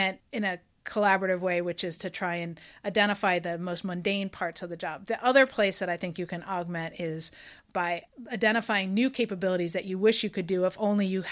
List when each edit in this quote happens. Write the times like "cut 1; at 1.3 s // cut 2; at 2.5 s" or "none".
none